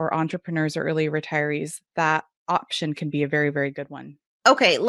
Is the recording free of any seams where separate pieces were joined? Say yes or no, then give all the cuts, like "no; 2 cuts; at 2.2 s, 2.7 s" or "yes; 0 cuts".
yes; 0 cuts